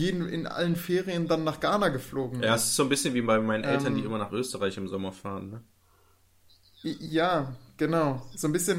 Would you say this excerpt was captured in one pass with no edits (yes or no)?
yes